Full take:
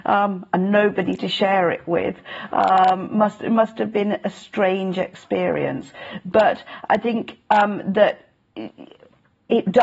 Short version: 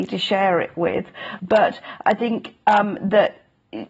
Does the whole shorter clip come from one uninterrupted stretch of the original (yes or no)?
no